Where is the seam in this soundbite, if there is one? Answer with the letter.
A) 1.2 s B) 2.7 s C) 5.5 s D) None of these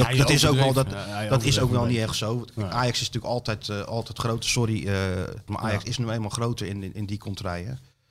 C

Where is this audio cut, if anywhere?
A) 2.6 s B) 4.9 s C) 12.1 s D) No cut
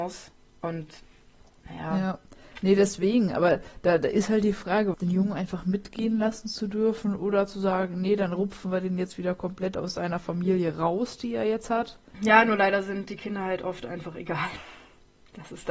B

